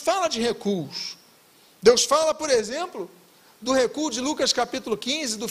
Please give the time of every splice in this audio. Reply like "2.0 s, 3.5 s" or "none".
none